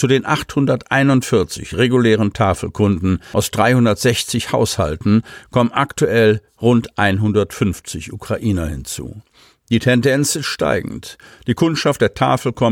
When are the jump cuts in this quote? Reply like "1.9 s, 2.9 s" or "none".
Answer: none